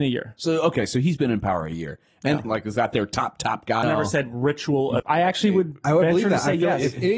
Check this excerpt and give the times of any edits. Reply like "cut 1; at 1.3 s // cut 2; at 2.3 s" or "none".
cut 1; at 2.4 s // cut 2; at 3.8 s // cut 3; at 5.0 s